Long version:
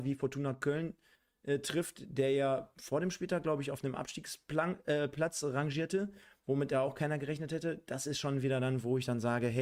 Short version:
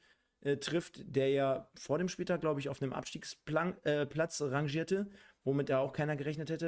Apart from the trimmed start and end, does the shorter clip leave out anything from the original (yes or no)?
no